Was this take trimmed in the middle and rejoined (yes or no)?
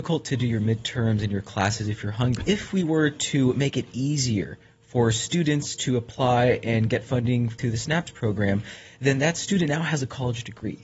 yes